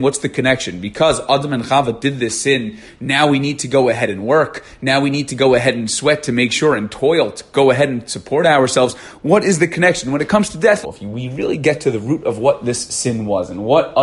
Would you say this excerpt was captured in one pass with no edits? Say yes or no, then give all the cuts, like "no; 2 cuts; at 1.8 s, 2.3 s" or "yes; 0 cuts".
no; 1 cut; at 10.8 s